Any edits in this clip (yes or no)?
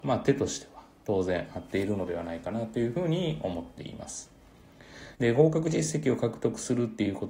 yes